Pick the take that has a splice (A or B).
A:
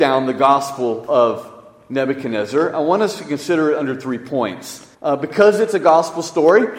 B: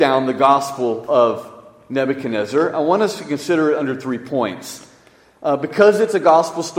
A